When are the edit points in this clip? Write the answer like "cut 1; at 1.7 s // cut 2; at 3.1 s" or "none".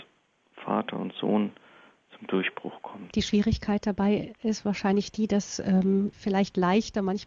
cut 1; at 3.1 s // cut 2; at 6.1 s